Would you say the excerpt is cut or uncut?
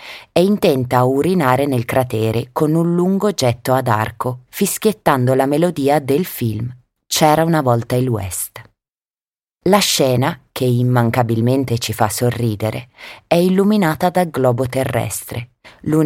cut